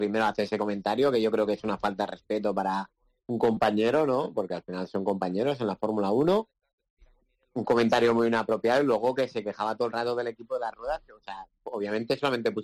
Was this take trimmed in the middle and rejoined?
no; 0 cuts

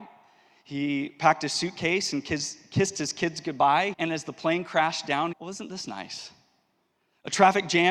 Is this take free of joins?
no; 2 cuts; at 3.9 s, 5.3 s

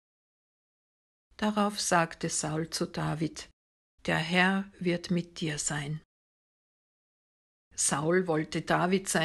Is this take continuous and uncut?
no; 1 cut; at 4.0 s

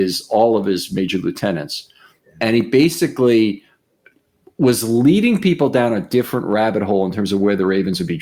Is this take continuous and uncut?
yes; 0 cuts

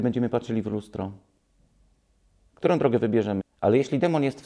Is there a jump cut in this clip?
yes; 1 cut; at 3.4 s

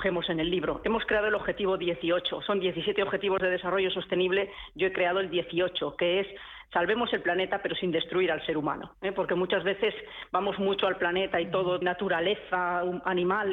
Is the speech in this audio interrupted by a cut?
yes; 1 cut; at 11.8 s

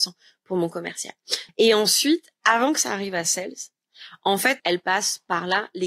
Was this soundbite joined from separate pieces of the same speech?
yes; 2 cuts; at 1.5 s, 4.6 s

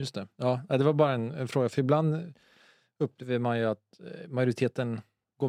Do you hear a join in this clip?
no; 0 cuts

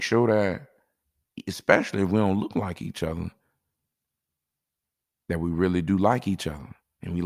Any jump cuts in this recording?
no; 0 cuts

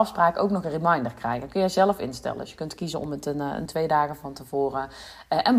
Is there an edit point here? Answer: yes; 1 cut; at 3.7 s

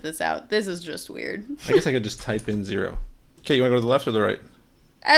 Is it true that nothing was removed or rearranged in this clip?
no; 1 cut; at 3.2 s

